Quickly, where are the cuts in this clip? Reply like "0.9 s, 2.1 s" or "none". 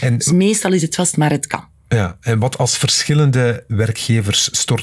none